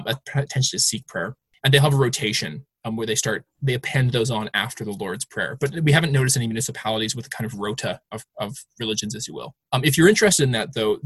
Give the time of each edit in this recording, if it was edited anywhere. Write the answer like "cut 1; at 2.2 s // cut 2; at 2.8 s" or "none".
none